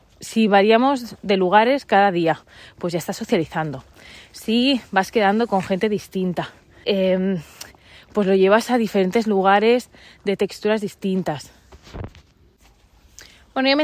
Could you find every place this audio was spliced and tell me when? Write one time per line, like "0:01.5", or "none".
0:06.8